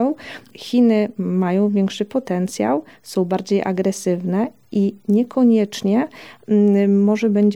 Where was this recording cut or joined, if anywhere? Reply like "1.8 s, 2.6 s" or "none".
none